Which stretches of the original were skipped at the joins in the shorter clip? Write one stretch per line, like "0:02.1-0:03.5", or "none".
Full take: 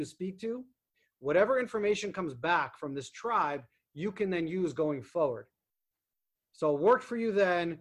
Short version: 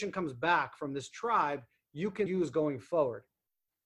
0:04.3-0:04.5